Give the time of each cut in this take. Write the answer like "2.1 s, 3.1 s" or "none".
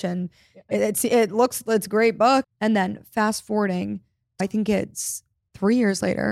2.4 s, 4.4 s